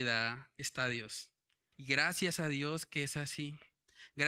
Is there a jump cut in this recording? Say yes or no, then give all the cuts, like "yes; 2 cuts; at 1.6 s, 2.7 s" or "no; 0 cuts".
yes; 1 cut; at 1.7 s